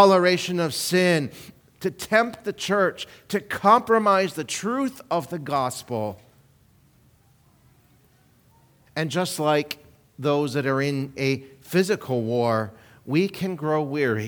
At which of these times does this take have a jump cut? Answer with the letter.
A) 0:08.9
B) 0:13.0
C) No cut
A